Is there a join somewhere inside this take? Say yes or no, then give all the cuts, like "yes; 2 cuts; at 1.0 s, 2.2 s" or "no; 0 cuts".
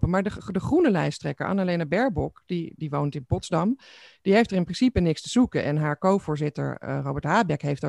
no; 0 cuts